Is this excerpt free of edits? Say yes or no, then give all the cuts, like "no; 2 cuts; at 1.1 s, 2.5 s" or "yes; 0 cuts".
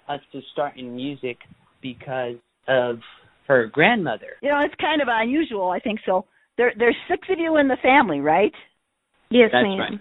no; 1 cut; at 4.4 s